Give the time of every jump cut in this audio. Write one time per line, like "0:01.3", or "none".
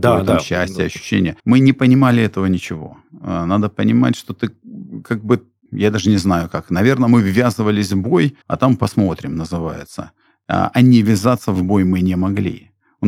0:01.4
0:08.4

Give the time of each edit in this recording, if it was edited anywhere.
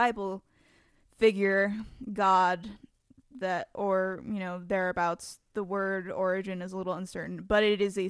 none

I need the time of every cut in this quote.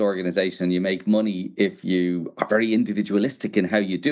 none

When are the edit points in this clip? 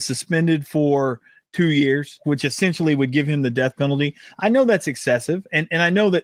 0:02.2

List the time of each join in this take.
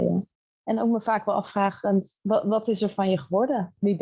none

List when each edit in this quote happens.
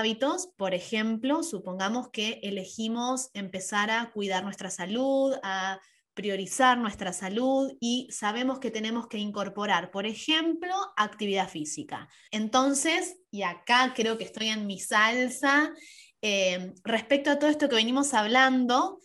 0:12.3

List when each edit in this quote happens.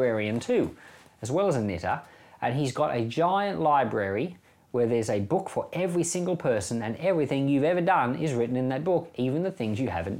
none

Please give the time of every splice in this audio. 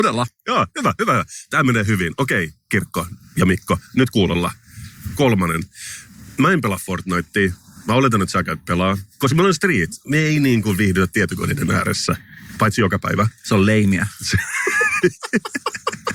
none

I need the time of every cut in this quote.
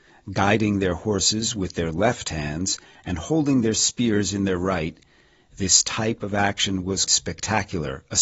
0:05.5
0:07.1

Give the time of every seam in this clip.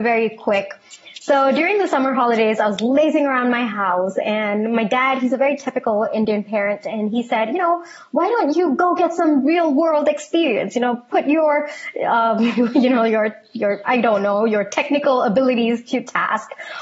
none

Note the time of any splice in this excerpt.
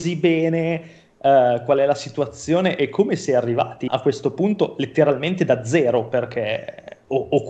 0:03.9

